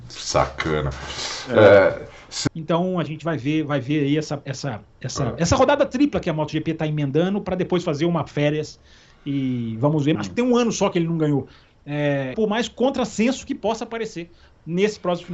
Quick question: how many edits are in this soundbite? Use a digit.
3